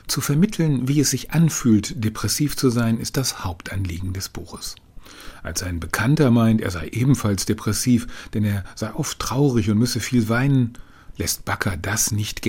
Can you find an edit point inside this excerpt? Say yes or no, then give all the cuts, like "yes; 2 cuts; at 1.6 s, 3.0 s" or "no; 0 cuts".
no; 0 cuts